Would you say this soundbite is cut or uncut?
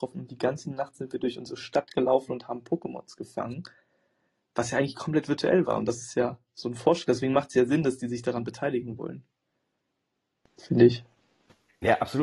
uncut